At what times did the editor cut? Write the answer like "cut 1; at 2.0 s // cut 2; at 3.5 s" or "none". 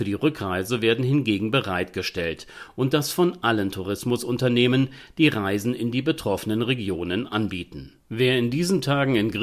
none